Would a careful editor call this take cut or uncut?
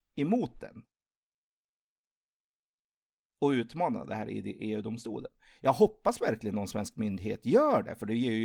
uncut